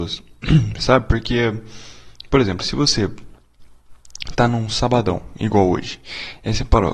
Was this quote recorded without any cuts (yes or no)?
yes